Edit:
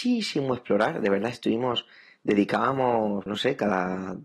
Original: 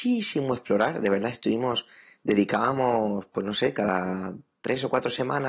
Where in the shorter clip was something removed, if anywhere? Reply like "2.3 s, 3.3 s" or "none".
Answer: 3.3 s